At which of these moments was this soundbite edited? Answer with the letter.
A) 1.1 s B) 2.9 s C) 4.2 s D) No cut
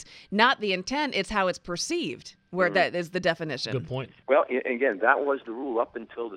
C